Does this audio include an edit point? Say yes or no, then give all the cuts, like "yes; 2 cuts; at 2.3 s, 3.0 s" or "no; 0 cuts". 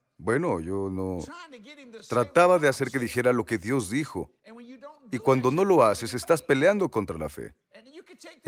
no; 0 cuts